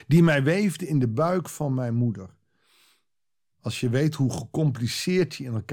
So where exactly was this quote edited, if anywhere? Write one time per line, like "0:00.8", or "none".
none